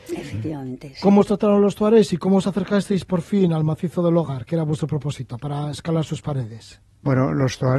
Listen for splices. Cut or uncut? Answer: uncut